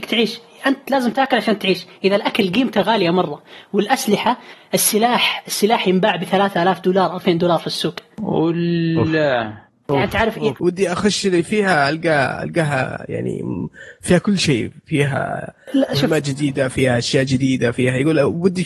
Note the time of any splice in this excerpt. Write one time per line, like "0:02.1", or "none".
0:10.6